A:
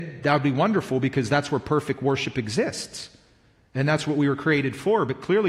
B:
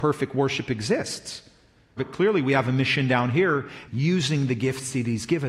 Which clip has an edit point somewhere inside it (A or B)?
B